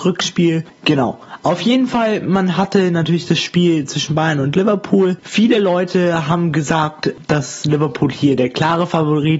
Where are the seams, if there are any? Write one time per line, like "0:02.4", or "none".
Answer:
none